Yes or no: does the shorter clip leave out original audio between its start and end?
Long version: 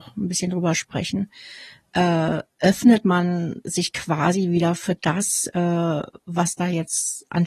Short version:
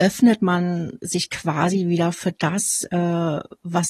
no